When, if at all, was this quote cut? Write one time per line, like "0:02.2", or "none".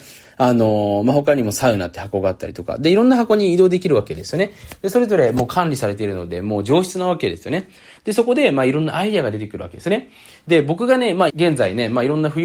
0:11.3